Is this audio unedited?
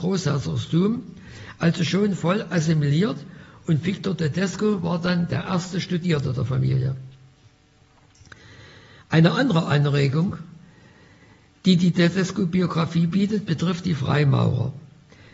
yes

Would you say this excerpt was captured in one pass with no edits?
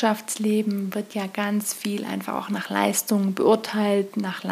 yes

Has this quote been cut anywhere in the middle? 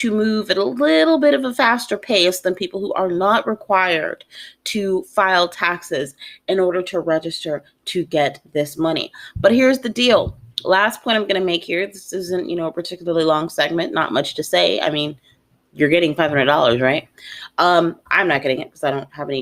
no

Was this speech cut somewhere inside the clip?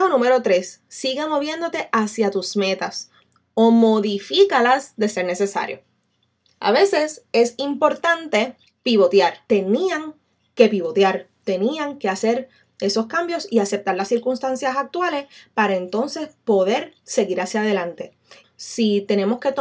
yes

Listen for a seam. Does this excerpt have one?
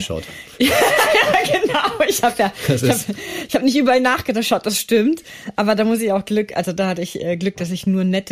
no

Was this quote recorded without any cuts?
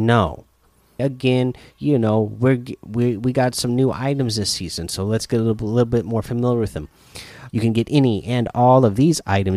no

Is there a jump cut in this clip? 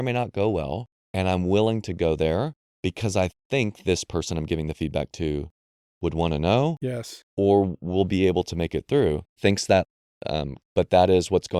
yes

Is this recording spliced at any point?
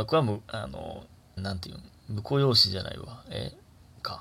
yes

